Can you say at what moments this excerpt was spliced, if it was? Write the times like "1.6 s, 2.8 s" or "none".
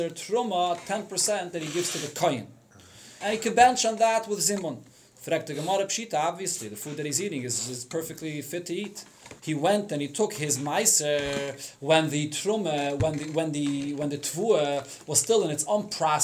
3.2 s, 9.4 s